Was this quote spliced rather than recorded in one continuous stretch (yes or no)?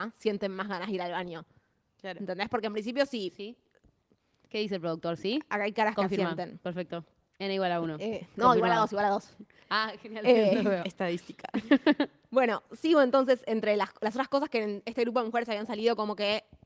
no